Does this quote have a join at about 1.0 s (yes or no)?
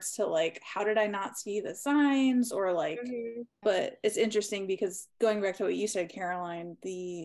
no